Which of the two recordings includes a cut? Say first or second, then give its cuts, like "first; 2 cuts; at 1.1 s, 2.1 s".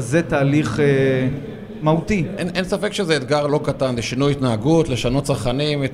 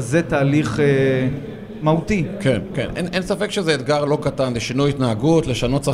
first; 1 cut; at 2.4 s